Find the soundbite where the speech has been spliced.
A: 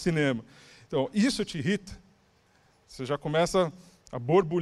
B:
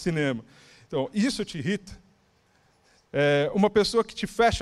A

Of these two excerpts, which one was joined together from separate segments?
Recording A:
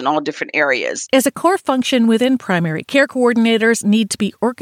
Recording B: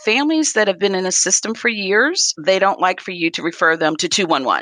A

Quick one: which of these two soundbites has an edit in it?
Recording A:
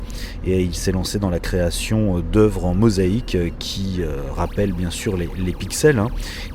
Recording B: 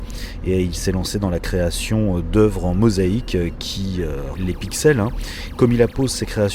B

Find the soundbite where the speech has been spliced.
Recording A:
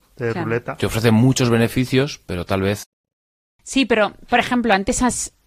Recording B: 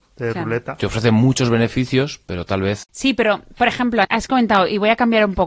B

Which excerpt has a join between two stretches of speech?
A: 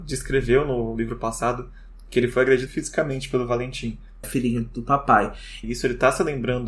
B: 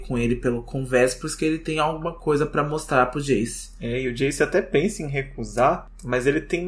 A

